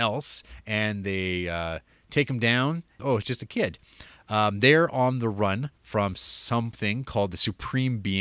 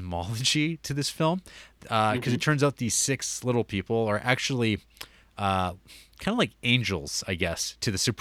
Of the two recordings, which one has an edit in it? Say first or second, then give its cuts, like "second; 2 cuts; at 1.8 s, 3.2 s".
first; 1 cut; at 3.0 s